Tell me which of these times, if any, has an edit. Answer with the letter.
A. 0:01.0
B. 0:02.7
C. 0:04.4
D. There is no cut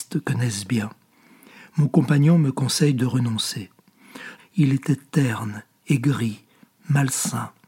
C